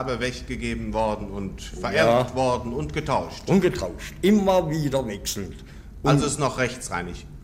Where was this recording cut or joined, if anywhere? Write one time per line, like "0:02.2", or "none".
none

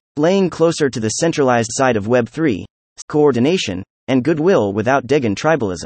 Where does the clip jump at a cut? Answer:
0:03.0

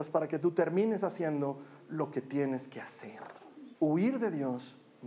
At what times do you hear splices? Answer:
0:03.7

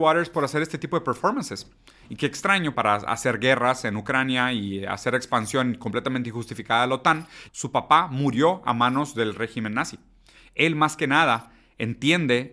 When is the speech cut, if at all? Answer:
0:02.7
0:07.5

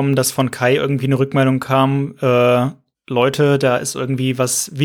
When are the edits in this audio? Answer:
none

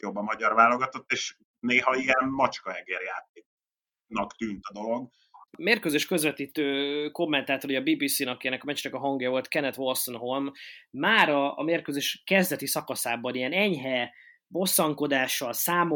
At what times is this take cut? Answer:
0:05.5

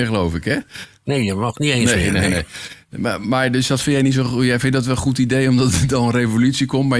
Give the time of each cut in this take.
none

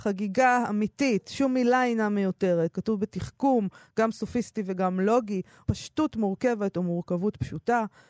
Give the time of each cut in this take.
0:02.7
0:05.6

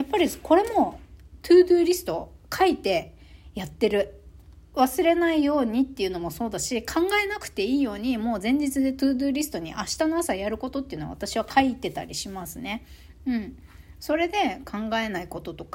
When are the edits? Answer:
none

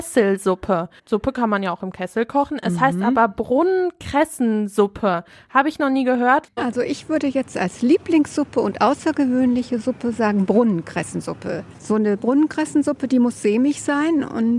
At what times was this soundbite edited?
0:01.0
0:06.5
0:11.8

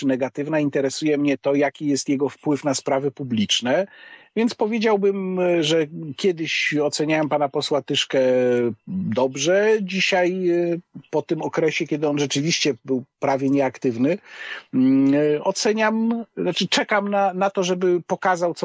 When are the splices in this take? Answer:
none

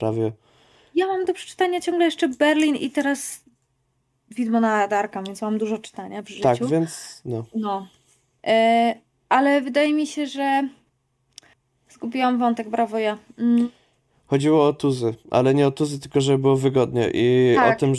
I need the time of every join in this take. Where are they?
none

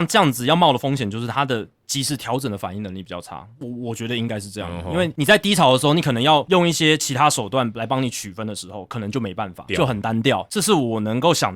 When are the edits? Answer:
0:03.6
0:09.7

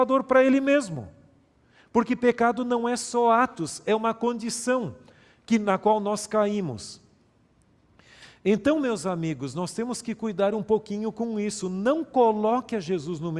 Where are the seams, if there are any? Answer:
none

